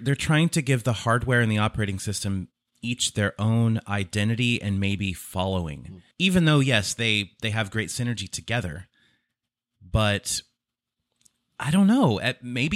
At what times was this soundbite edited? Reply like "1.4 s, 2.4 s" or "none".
6.1 s